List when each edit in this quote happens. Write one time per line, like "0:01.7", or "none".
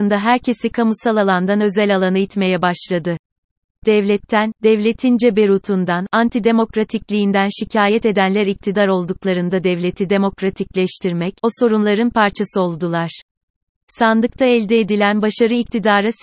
0:11.4
0:13.7